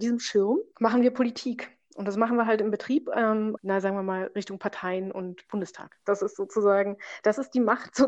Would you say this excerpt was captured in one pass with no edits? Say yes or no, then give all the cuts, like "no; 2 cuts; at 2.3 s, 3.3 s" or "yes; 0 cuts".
no; 2 cuts; at 3.6 s, 6.0 s